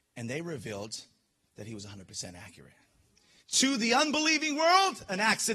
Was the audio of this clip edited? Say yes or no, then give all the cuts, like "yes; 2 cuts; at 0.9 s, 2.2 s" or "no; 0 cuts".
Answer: yes; 1 cut; at 3.4 s